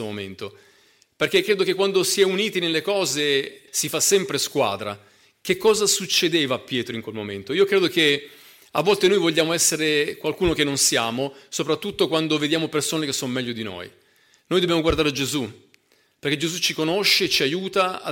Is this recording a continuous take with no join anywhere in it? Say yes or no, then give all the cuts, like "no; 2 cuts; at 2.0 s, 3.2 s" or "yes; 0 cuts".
no; 1 cut; at 3.7 s